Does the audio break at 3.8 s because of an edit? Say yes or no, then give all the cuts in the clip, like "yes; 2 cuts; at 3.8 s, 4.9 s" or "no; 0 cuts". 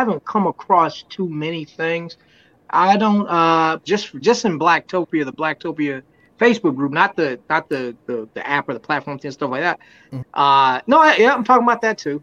yes; 3 cuts; at 3.8 s, 8.3 s, 10.2 s